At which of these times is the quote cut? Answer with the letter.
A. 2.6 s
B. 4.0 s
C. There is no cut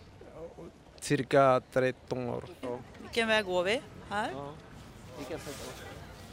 A